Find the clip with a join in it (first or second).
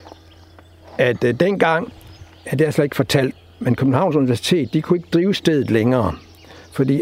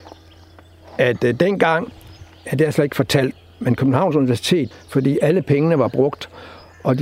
second